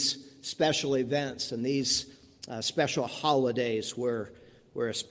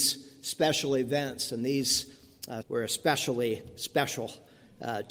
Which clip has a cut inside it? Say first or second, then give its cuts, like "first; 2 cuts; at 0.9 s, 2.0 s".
second; 1 cut; at 2.6 s